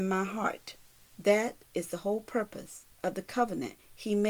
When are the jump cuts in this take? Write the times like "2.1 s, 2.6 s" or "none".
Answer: 1.0 s, 2.9 s